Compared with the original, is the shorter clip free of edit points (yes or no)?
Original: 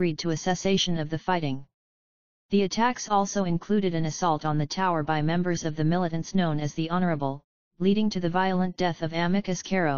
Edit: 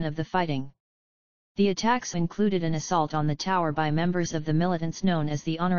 no